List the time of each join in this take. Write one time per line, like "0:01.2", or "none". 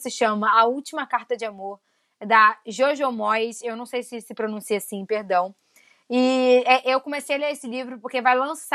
none